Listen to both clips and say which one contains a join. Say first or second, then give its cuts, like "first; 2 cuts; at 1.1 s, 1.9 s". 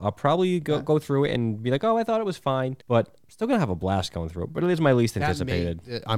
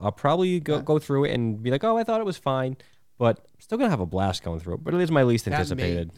first; 1 cut; at 2.8 s